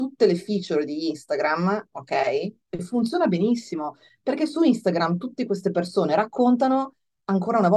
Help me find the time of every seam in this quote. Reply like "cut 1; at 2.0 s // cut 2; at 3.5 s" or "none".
cut 1; at 2.7 s